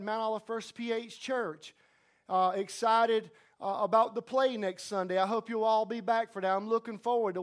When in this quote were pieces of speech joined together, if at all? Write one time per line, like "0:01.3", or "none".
none